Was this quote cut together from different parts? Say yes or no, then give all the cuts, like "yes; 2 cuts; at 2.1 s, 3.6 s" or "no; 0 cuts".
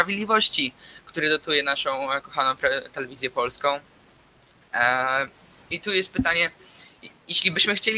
no; 0 cuts